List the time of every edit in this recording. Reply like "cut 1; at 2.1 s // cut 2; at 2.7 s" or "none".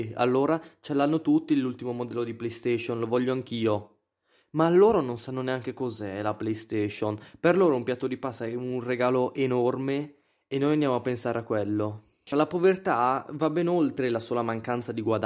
cut 1; at 12.3 s